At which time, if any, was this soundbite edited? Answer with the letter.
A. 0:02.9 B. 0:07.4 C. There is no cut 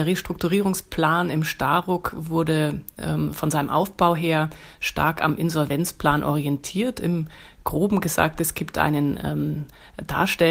C